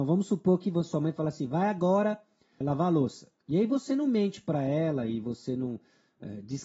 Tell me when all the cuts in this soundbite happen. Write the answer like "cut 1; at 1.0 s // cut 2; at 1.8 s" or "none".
cut 1; at 2.6 s